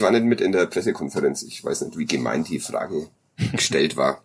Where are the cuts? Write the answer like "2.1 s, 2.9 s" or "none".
3.1 s